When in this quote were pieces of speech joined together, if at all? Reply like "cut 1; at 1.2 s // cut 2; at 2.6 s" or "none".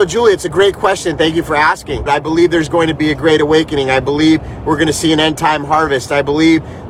cut 1; at 2.1 s